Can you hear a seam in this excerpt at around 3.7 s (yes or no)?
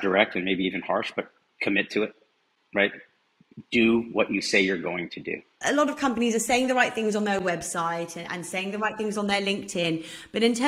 no